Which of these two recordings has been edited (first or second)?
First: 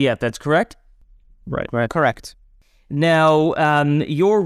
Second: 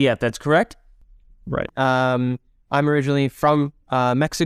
second